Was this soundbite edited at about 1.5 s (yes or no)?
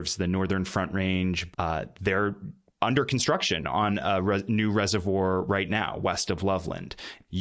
yes